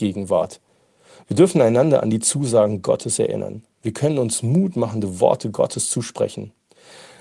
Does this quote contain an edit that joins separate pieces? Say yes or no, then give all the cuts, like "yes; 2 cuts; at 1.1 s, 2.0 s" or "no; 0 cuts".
no; 0 cuts